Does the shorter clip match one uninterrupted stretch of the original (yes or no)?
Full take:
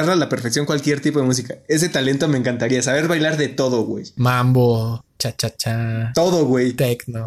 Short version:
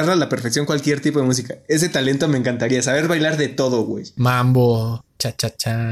yes